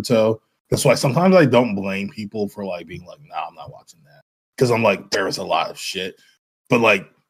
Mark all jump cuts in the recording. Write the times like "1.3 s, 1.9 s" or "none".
none